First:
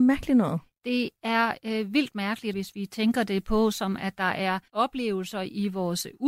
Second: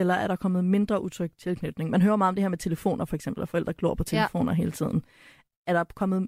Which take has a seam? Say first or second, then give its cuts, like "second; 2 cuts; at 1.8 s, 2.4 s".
first; 2 cuts; at 2.5 s, 4.7 s